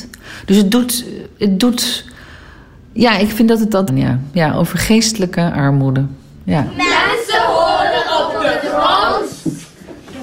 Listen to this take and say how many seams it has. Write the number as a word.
one